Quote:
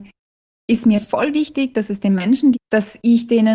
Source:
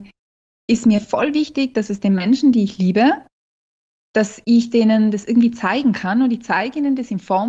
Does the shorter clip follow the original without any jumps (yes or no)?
no